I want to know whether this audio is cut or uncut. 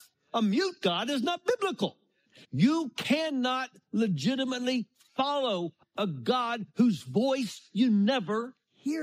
cut